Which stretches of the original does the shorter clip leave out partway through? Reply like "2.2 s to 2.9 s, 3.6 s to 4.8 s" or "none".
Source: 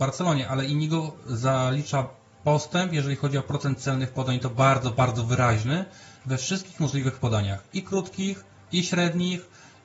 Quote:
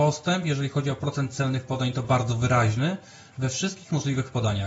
4.5 s to 4.9 s

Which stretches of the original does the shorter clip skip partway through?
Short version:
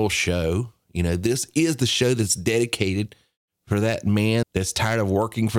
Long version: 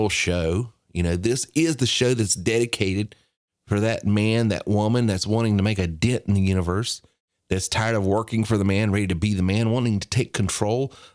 4.4 s to 7.4 s

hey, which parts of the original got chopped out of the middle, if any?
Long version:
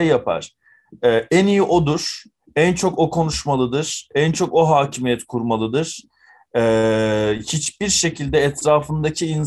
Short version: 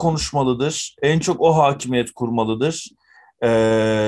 none

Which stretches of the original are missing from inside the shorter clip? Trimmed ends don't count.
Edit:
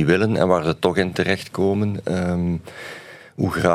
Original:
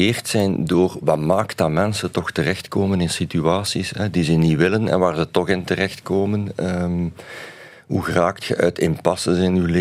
none

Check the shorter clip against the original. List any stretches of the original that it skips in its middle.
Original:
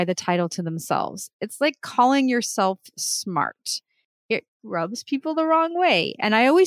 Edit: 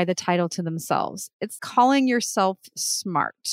1.6 s to 1.8 s

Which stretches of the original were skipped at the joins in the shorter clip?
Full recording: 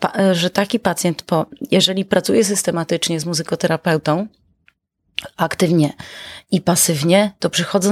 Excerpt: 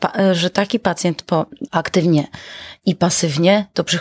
1.7 s to 5.3 s

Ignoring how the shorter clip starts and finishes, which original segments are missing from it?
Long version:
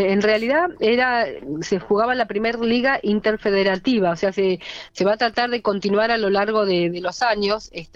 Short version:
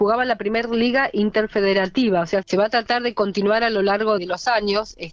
4.3 s to 4.9 s, 6.6 s to 6.9 s

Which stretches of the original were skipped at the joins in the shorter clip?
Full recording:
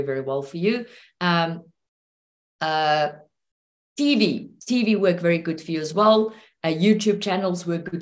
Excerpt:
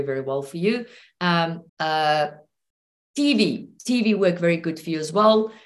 1.7 s to 2.5 s

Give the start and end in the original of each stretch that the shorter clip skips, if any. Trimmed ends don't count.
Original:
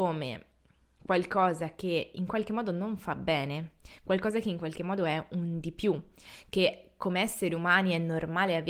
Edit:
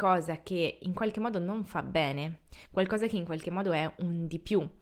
none

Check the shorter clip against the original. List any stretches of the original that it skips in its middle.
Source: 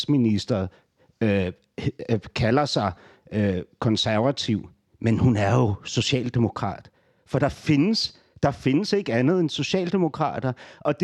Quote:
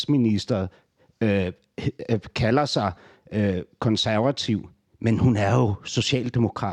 none

